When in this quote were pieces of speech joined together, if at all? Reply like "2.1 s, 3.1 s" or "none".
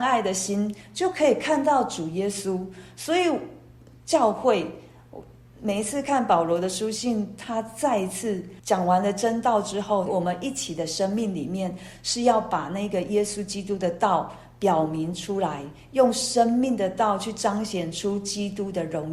8.6 s, 10.1 s